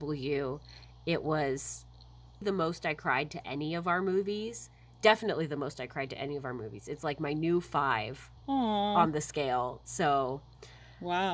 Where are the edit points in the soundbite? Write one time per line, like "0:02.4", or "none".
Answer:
0:02.4
0:08.4